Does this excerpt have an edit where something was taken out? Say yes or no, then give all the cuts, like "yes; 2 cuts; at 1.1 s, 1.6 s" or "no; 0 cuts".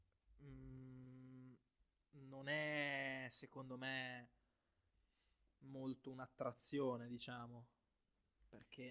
no; 0 cuts